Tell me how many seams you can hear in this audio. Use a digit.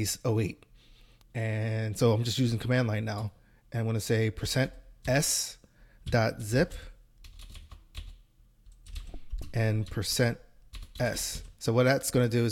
1